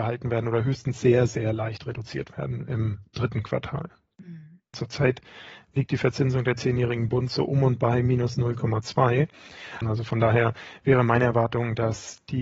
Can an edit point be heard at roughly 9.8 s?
yes; 2 cuts; at 4.7 s, 9.8 s

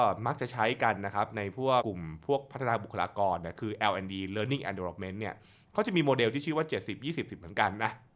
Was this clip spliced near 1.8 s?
yes; 1 cut; at 1.8 s

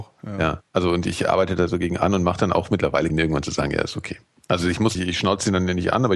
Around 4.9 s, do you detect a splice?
yes; 2 cuts; at 3.1 s, 4.9 s

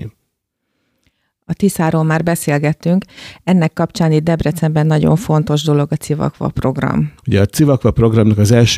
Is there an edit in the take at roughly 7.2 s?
yes; 1 cut; at 7.2 s

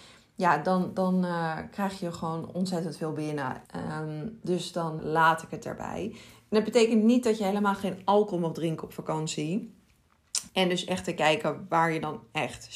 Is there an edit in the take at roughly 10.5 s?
yes; 3 cuts; at 3.7 s, 5.0 s, 10.5 s

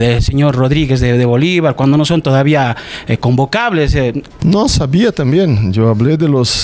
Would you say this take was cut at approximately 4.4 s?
yes; 1 cut; at 4.4 s

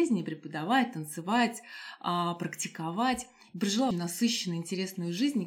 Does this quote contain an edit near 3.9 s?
yes; 1 cut; at 3.9 s

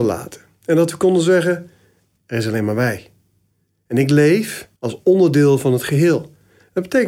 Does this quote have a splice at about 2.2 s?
yes; 2 cuts; at 2.2 s, 4.8 s

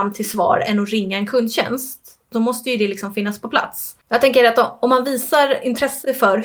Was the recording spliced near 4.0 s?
yes; 1 cut; at 4.0 s

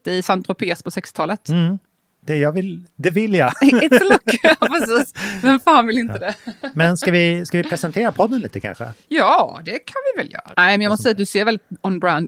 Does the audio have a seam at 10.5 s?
yes; 1 cut; at 10.5 s

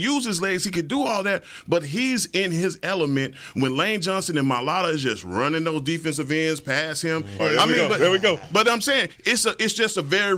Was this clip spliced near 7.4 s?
yes; 1 cut; at 7.4 s

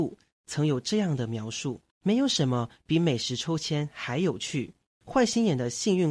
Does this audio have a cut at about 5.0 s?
no; 1 cut; at 1.9 s

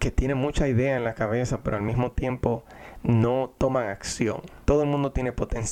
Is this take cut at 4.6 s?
yes; 1 cut; at 4.6 s

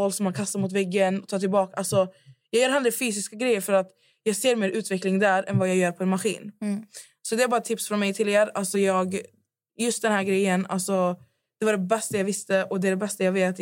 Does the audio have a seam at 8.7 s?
no; 0 cuts

